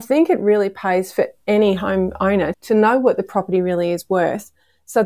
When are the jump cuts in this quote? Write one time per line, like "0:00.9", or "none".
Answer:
0:02.5